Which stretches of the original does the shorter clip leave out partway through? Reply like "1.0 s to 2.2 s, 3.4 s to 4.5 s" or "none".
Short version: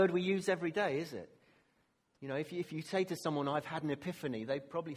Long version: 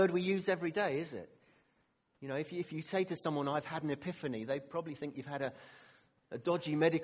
none